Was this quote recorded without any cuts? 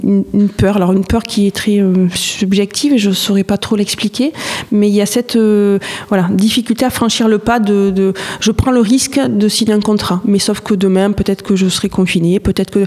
yes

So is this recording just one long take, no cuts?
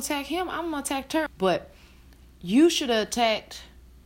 no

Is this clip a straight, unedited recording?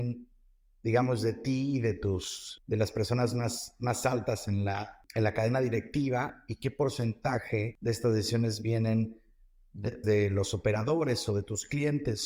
no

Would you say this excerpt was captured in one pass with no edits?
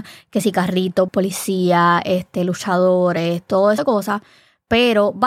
no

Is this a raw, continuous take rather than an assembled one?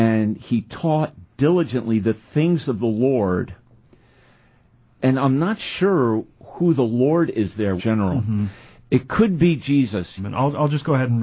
no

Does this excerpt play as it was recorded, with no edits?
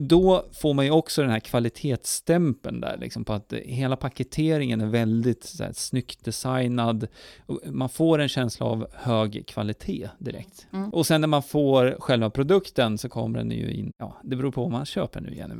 no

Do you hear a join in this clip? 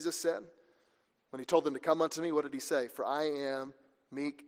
no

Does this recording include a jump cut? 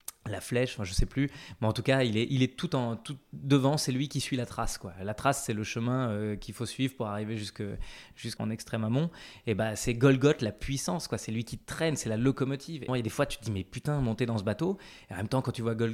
yes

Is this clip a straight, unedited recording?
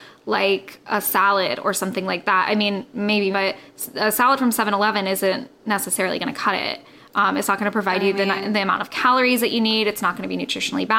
no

